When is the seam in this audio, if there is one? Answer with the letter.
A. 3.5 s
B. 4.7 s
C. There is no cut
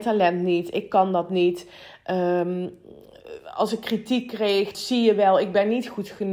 B